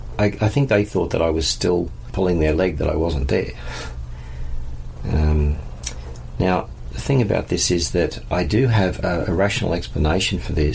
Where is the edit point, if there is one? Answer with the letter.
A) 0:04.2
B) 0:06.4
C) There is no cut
C